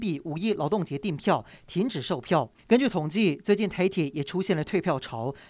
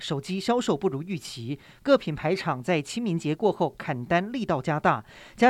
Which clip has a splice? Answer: first; 1 cut; at 2.6 s

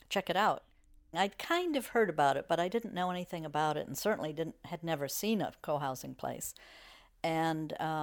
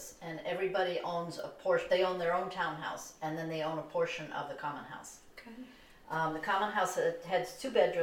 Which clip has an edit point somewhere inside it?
first; 1 cut; at 1.1 s

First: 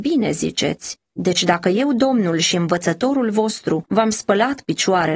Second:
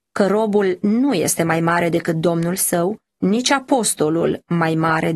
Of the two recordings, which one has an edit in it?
first; 1 cut; at 1.1 s

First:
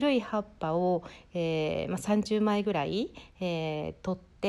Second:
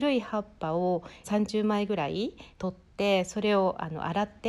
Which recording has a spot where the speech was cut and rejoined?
second; 2 cuts; at 1.2 s, 2.6 s

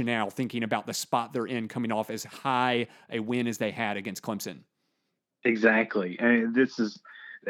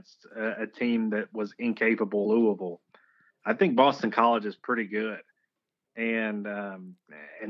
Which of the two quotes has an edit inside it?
second; 1 cut; at 2.2 s

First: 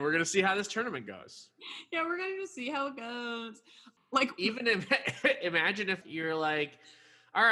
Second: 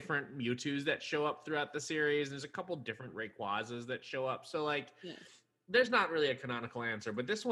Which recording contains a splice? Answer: first; 2 cuts; at 4.0 s, 6.0 s

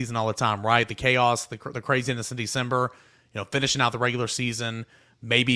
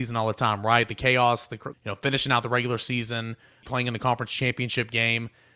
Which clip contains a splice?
second; 2 cuts; at 1.7 s, 3.6 s

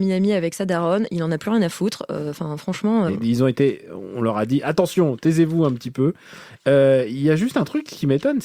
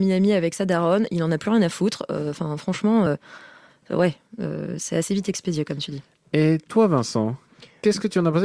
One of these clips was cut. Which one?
first; 1 cut; at 3.1 s

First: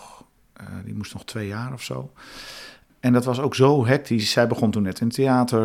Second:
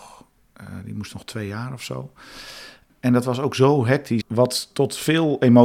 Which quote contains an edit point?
second; 1 cut; at 4.2 s

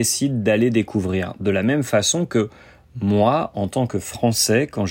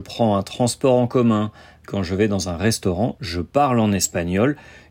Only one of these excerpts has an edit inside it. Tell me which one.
second; 1 cut; at 1.8 s

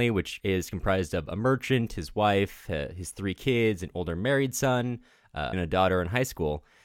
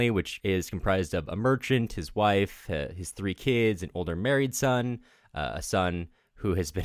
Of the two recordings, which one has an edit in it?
first; 1 cut; at 5.5 s

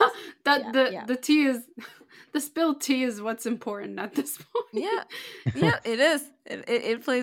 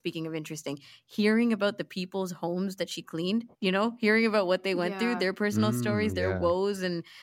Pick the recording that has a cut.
second; 1 cut; at 3.5 s

